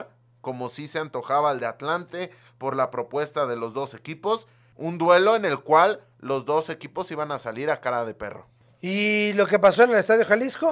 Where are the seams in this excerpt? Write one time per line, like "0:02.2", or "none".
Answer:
0:04.7

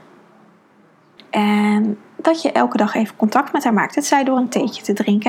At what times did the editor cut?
0:01.2

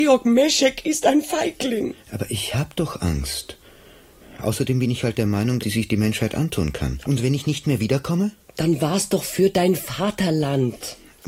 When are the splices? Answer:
0:05.6
0:07.0

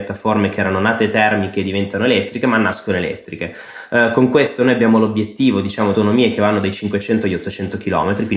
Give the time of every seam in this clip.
0:05.9

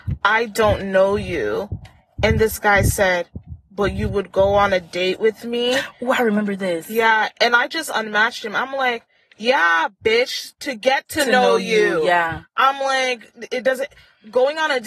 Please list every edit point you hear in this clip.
0:03.7

